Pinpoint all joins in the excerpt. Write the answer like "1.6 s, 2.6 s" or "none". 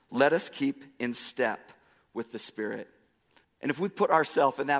3.4 s